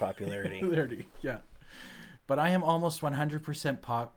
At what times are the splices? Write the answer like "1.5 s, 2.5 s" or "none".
2.2 s